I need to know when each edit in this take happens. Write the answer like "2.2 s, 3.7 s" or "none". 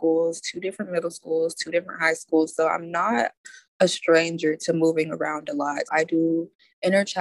5.9 s